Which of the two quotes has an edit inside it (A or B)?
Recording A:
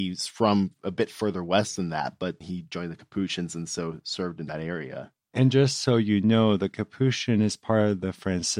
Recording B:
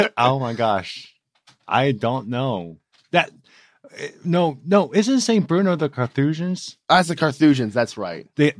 A